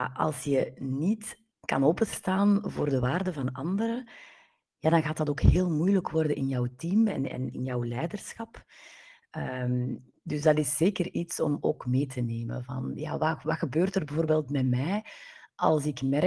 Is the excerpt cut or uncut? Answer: uncut